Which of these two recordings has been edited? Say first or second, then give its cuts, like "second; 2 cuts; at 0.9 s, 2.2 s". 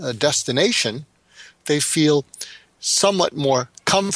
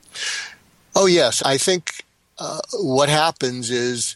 second; 1 cut; at 1.4 s